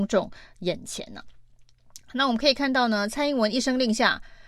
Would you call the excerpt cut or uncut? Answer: uncut